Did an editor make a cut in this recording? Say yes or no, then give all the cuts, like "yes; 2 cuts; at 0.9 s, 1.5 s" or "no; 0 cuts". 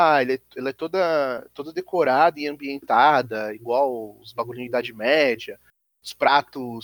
no; 0 cuts